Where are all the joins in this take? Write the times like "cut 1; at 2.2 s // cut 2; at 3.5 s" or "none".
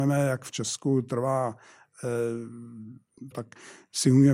cut 1; at 3.3 s